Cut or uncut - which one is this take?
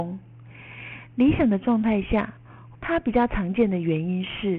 cut